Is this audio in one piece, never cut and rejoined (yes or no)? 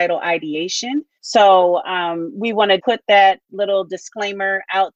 no